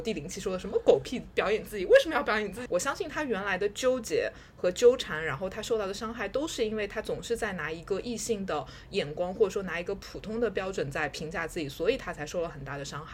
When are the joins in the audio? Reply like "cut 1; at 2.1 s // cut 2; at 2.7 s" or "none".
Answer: cut 1; at 2.7 s

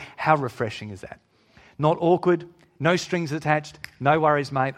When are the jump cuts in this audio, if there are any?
cut 1; at 2.8 s

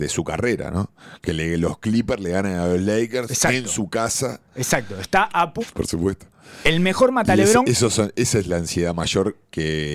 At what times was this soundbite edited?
cut 1; at 5.6 s

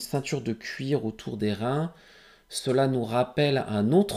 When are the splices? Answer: none

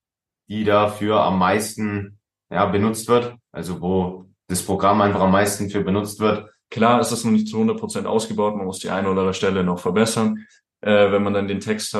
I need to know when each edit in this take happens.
cut 1; at 3.4 s // cut 2; at 6.7 s

